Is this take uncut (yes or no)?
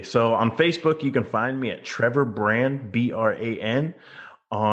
yes